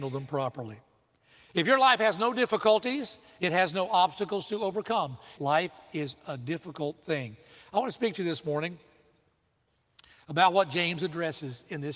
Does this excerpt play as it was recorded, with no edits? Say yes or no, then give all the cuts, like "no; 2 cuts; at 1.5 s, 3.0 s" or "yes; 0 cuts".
no; 1 cut; at 5.4 s